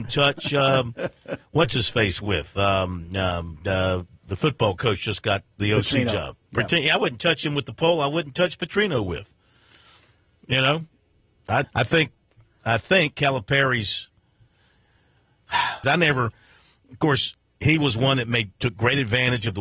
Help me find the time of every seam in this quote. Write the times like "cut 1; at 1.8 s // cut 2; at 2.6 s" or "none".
cut 1; at 11.6 s // cut 2; at 15.8 s